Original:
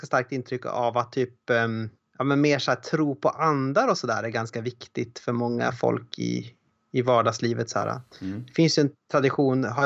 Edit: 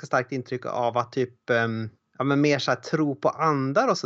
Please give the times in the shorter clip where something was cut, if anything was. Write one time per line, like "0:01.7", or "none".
none